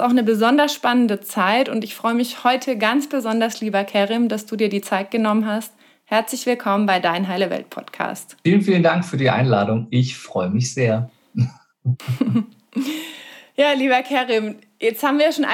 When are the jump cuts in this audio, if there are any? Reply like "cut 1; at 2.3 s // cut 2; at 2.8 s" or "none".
none

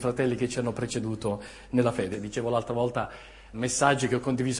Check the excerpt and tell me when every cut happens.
cut 1; at 2.1 s // cut 2; at 3.5 s

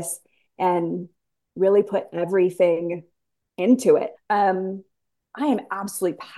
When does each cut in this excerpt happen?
cut 1; at 4.1 s

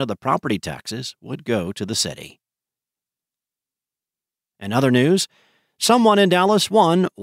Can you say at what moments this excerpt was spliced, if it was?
none

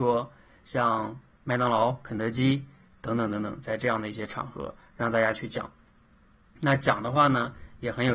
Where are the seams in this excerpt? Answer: none

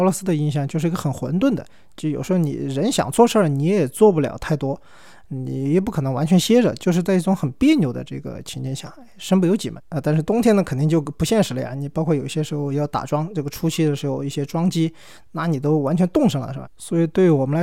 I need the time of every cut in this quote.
cut 1; at 9.8 s // cut 2; at 16.6 s

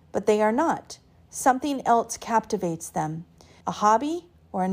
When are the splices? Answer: cut 1; at 3.6 s

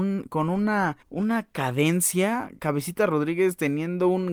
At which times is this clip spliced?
cut 1; at 1.0 s

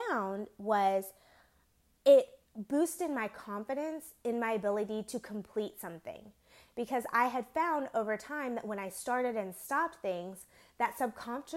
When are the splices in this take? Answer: cut 1; at 2.5 s

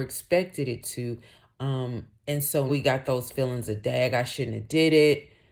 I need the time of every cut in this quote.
cut 1; at 2.7 s

